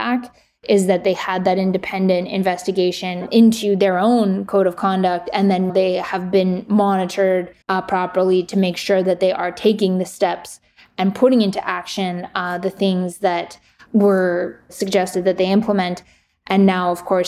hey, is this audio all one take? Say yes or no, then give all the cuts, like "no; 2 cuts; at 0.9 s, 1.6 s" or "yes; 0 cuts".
no; 2 cuts; at 5.7 s, 7.6 s